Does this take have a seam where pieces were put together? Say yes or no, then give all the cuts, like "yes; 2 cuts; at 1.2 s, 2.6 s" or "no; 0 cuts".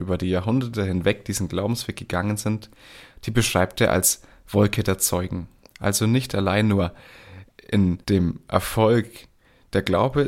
yes; 2 cuts; at 5.6 s, 8.0 s